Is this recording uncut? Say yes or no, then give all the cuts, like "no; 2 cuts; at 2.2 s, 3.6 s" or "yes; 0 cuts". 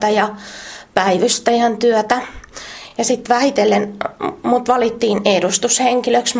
yes; 0 cuts